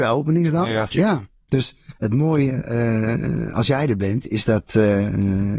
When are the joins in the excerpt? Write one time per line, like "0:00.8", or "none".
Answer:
0:00.9